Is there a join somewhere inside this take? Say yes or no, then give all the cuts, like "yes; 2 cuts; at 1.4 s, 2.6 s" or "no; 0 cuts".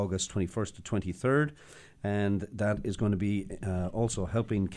no; 0 cuts